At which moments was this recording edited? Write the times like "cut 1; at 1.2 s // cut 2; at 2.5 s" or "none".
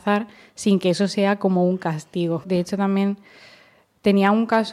cut 1; at 2.4 s